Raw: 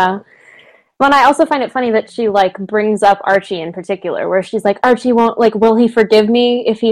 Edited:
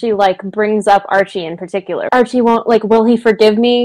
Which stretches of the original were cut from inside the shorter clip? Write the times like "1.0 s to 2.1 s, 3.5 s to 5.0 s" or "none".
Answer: 4.2 s to 4.8 s